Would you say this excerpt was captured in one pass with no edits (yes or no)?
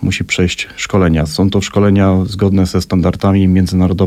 yes